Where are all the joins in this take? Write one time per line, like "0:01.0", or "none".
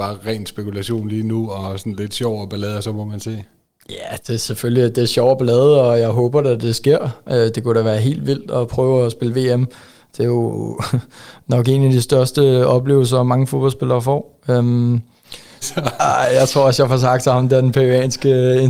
0:04.2
0:15.6